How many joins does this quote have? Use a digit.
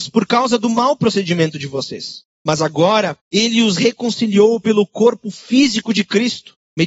0